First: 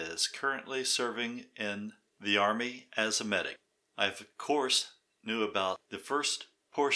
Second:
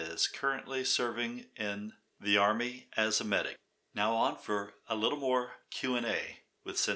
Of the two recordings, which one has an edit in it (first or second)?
first